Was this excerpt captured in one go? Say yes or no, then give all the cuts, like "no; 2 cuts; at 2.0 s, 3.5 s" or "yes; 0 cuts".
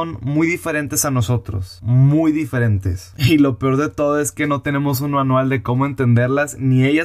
yes; 0 cuts